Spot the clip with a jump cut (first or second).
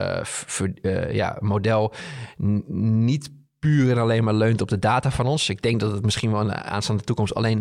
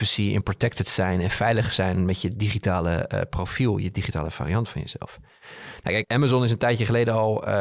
second